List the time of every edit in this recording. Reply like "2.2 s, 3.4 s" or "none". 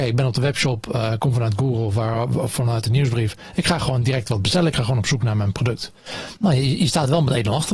6.4 s